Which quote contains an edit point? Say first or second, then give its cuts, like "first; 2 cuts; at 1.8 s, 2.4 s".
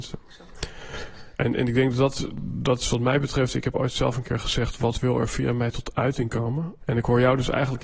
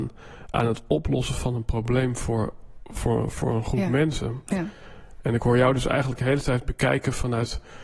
first; 1 cut; at 6.8 s